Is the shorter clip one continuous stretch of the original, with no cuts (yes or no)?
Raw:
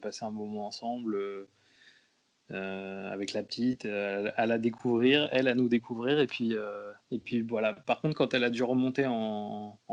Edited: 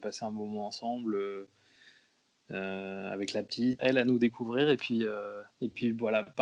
no